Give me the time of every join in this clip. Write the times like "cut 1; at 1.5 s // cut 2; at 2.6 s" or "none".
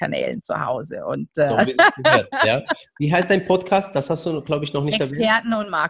none